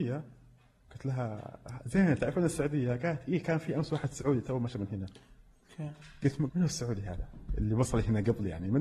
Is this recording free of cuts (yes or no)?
no